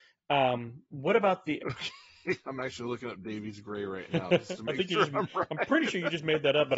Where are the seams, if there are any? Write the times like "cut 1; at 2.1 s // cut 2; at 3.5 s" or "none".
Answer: cut 1; at 1.6 s